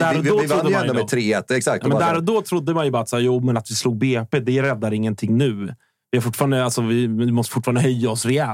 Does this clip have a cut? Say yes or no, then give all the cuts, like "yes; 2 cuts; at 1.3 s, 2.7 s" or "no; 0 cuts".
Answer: no; 0 cuts